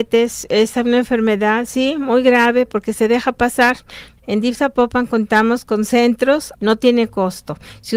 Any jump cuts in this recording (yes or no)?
yes